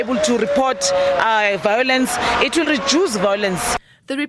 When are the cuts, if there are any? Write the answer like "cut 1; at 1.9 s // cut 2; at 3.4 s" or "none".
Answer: cut 1; at 2.7 s